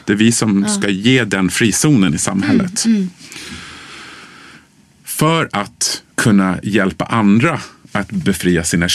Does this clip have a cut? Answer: yes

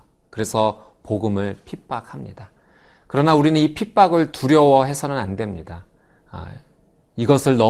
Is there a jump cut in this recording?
no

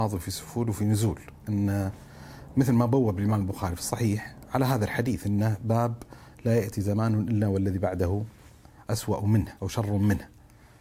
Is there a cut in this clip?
yes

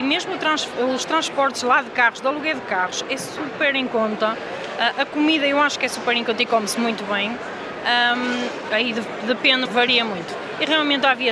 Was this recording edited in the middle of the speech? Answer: yes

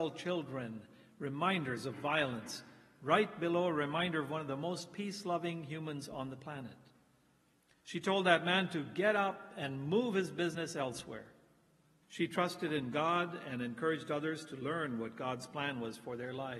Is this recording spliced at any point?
yes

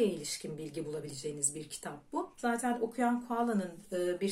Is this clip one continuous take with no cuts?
no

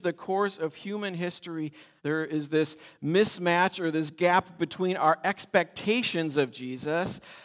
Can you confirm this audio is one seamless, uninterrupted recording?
no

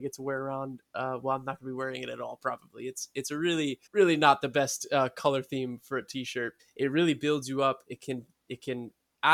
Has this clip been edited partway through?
yes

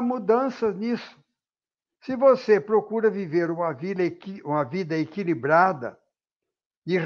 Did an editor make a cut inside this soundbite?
no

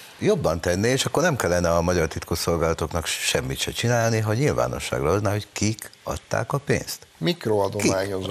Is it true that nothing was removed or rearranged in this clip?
no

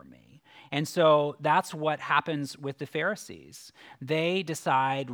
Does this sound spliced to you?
no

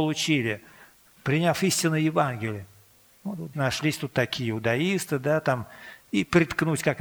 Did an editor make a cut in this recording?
yes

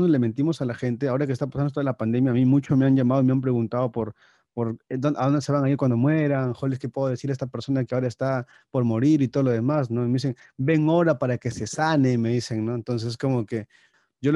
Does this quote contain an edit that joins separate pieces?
no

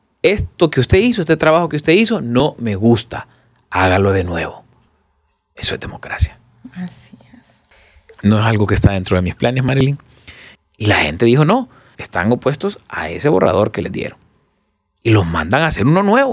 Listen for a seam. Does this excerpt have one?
yes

